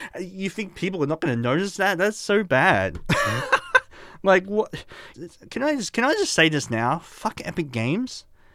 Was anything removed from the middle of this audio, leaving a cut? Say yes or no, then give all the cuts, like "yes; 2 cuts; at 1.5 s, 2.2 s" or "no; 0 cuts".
yes; 1 cut; at 5.1 s